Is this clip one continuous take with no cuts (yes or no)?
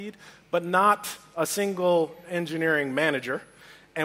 yes